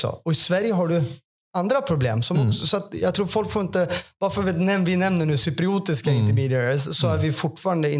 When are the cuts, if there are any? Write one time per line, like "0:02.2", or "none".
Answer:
none